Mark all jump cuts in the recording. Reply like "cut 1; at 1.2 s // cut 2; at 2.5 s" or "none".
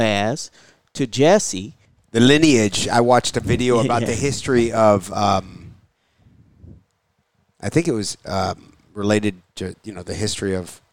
cut 1; at 2.0 s